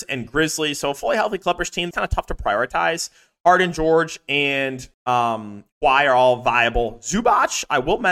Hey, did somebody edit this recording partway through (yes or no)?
yes